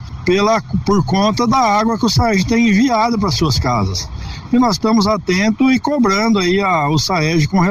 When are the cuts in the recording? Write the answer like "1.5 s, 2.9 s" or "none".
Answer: 4.5 s